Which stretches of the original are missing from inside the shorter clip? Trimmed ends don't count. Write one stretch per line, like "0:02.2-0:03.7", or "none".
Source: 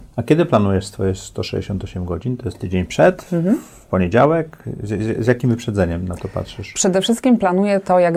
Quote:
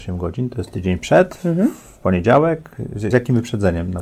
0:05.0-0:05.2